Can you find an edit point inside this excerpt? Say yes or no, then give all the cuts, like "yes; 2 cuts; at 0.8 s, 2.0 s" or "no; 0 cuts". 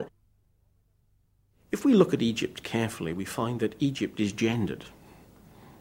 no; 0 cuts